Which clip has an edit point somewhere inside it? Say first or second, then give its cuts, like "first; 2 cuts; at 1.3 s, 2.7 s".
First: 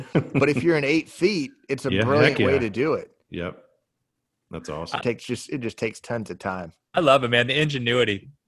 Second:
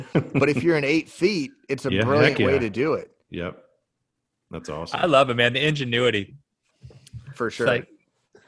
first; 2 cuts; at 5.0 s, 6.9 s